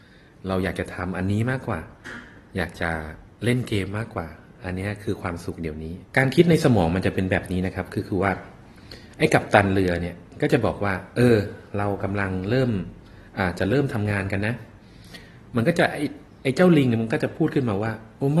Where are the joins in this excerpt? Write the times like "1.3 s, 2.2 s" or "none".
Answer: 6.1 s